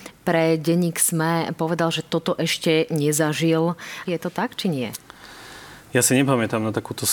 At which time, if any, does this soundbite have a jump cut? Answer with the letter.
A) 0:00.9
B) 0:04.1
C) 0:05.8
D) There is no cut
B